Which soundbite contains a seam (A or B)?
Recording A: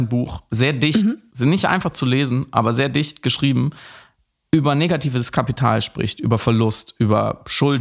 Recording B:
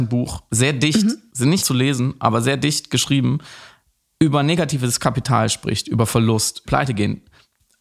B